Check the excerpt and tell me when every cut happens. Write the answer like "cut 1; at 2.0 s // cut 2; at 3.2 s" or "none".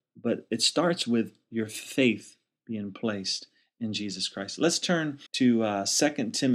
cut 1; at 5.3 s